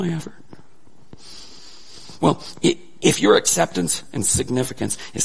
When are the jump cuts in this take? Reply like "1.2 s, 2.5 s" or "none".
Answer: 4.0 s